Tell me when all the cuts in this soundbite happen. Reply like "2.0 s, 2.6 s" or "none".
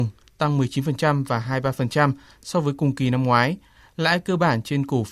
none